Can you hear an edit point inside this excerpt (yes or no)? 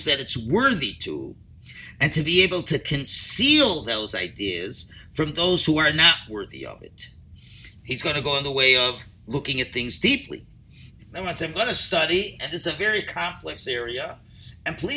yes